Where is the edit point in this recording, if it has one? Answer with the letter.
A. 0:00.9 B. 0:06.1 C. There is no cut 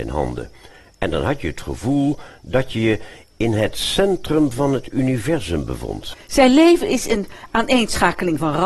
B